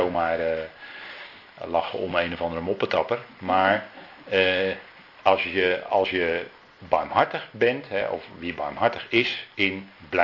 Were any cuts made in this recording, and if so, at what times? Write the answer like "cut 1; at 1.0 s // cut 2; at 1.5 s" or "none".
none